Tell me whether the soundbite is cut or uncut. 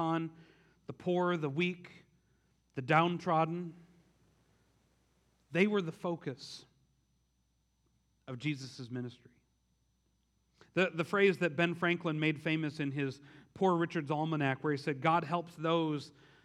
uncut